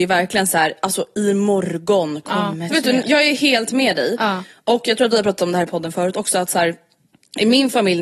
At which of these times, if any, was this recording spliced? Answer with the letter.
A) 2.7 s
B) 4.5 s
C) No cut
A